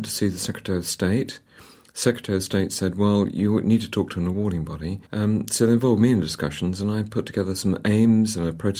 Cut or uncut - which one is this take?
cut